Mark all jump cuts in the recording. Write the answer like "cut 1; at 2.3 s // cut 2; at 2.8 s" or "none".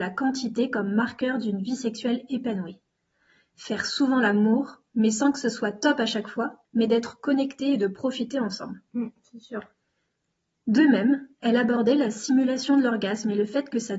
cut 1; at 6.6 s